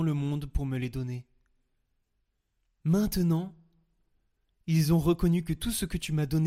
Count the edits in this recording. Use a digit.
1